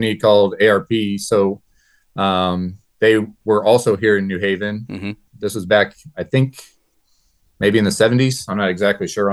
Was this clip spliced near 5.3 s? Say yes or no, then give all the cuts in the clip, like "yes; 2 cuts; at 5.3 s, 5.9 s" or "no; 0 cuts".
yes; 1 cut; at 5.3 s